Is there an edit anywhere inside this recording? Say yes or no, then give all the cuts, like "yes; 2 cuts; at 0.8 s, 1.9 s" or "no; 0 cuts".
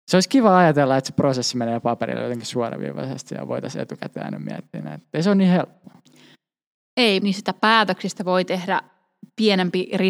yes; 1 cut; at 7.2 s